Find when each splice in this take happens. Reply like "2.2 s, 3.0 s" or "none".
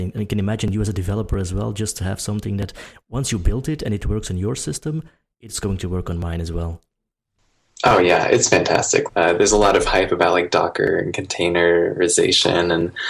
9.1 s